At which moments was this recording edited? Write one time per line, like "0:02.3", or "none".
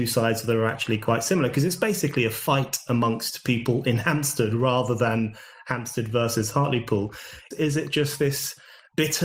0:07.5